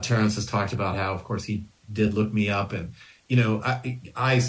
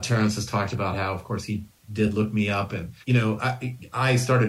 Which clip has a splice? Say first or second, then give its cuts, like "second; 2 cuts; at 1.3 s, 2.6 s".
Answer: second; 1 cut; at 3.0 s